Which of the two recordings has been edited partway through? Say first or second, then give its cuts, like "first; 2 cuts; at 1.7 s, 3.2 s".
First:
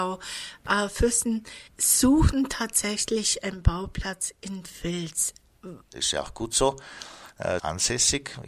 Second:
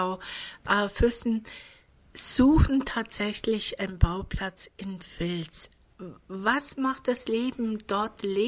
first; 3 cuts; at 1.7 s, 5.8 s, 7.6 s